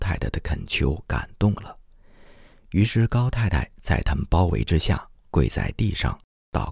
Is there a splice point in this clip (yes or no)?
no